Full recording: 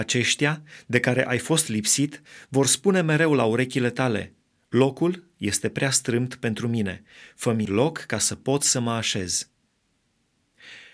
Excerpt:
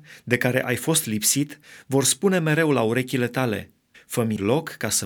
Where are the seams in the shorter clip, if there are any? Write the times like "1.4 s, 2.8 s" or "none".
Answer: 3.9 s